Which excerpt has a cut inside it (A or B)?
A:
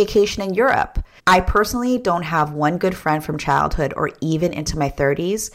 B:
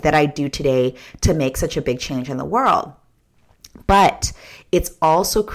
A